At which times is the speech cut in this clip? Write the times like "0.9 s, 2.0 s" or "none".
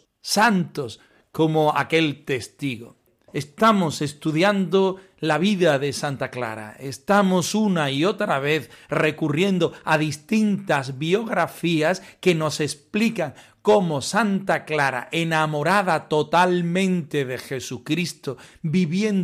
none